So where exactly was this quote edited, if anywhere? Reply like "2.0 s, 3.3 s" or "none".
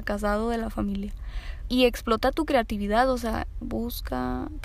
1.7 s, 3.6 s